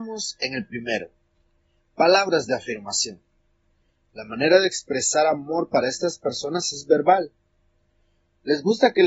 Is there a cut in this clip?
no; 0 cuts

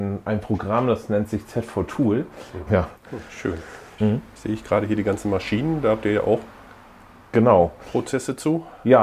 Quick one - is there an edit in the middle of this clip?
yes; 2 cuts; at 2.7 s, 4.0 s

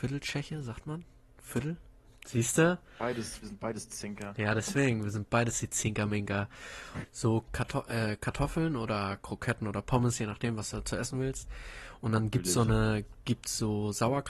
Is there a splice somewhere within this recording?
yes; 2 cuts; at 2.1 s, 7.0 s

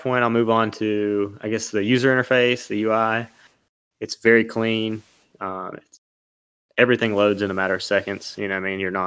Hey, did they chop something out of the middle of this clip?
no; 0 cuts

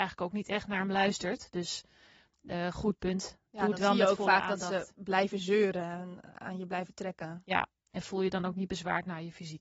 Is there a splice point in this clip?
no; 0 cuts

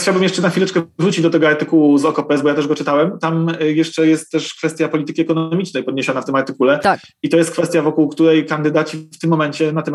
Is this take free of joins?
yes; 0 cuts

